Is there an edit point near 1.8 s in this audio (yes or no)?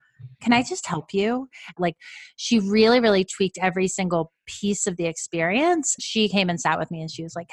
yes